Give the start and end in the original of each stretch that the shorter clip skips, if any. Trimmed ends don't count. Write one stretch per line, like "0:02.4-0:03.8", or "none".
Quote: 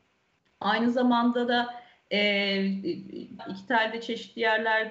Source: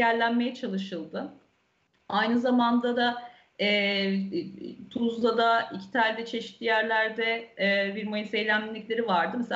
0:04.9-0:05.6